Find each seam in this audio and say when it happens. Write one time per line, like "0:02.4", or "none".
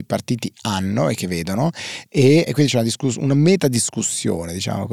0:02.5